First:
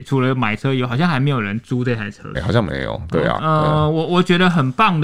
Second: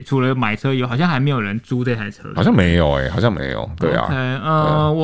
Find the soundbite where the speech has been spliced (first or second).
first